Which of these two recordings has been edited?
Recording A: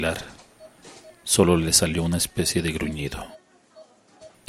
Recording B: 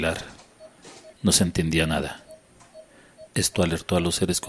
B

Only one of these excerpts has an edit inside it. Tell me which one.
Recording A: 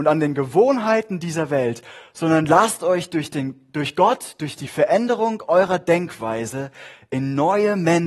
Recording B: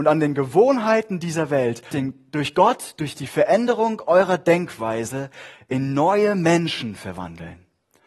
B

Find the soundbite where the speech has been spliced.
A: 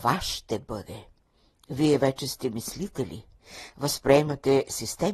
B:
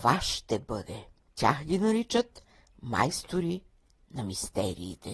B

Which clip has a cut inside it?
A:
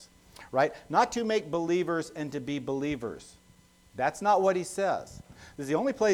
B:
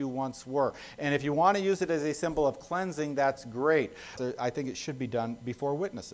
B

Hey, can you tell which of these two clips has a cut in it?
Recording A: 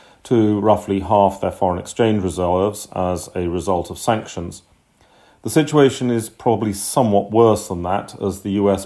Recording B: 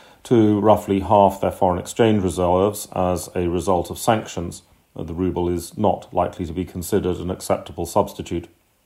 B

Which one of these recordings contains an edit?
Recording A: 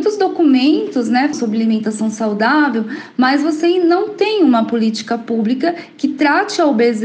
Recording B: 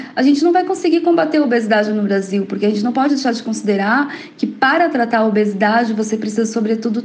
A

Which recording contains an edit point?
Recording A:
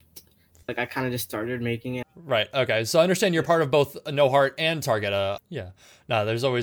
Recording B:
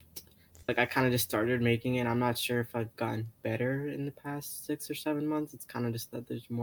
A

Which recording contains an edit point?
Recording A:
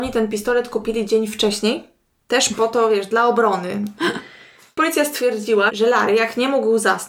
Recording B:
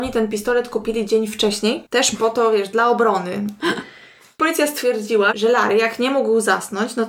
B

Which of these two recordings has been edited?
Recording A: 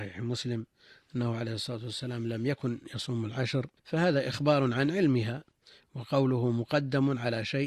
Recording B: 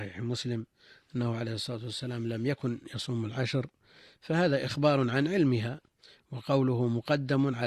A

